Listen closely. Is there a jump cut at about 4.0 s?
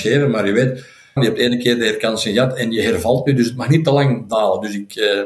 no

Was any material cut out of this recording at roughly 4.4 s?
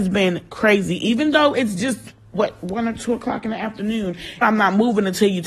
yes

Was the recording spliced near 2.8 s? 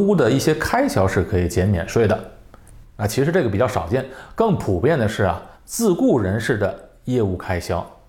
yes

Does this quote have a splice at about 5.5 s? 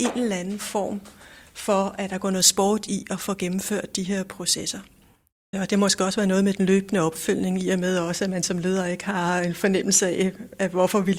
yes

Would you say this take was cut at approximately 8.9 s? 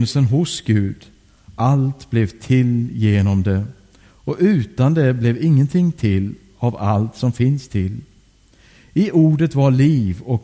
no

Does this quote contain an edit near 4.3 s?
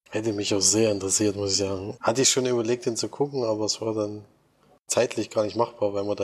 no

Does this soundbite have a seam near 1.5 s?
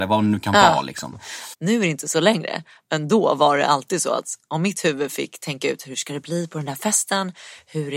yes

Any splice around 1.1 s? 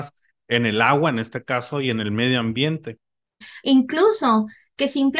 no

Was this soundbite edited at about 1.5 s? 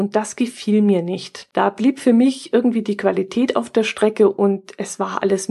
yes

